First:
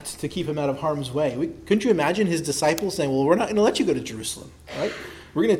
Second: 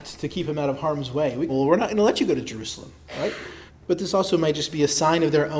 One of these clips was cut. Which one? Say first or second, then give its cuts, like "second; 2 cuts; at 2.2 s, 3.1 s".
second; 2 cuts; at 1.5 s, 3.7 s